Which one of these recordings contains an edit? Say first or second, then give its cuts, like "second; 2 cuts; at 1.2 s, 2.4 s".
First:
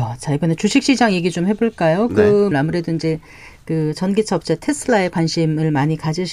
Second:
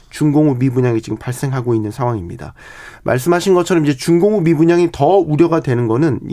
first; 1 cut; at 2.5 s